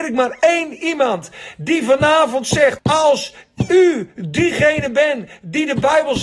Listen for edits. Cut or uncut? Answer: cut